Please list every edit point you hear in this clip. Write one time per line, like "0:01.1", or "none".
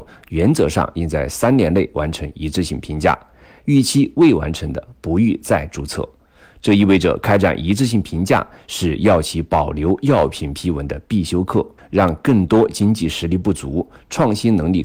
0:11.8